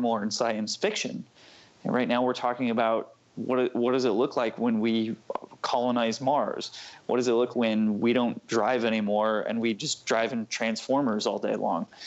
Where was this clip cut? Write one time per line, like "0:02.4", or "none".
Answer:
0:07.5